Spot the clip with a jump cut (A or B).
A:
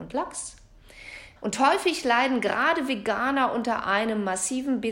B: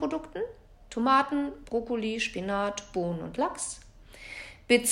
A